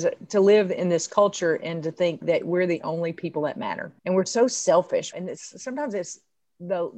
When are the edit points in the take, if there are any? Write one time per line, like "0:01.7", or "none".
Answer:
0:04.0
0:05.1